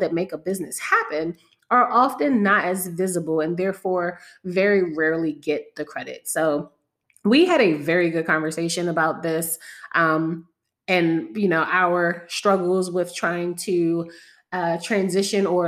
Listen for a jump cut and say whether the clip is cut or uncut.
uncut